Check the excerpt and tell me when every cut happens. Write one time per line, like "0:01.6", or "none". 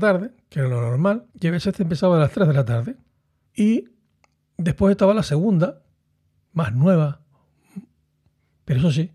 0:01.3
0:03.5
0:06.5